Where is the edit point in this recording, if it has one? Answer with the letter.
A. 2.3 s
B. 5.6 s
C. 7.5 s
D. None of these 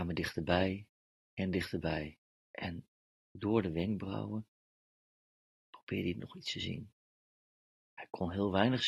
A